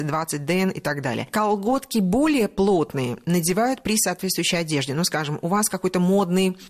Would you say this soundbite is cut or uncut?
uncut